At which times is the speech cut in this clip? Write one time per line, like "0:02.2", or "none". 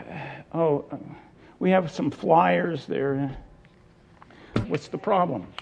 0:04.6